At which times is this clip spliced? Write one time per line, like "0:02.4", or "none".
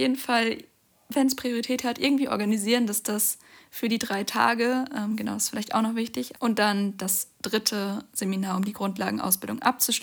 0:06.3